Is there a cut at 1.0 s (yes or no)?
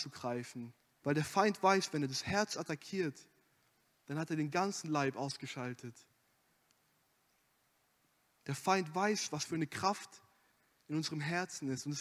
yes